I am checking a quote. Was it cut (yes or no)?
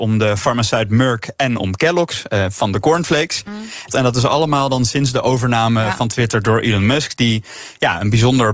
yes